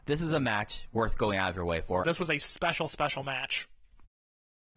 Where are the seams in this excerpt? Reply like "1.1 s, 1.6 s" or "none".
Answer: 2.0 s